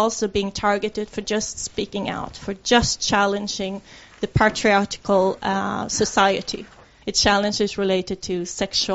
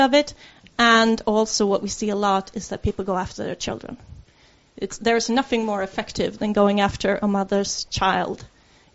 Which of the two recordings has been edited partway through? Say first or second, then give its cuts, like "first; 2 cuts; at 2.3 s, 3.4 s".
first; 1 cut; at 7.0 s